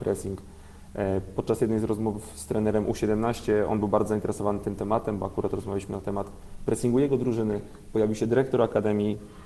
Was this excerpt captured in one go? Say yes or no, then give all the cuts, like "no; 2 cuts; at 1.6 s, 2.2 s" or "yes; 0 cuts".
yes; 0 cuts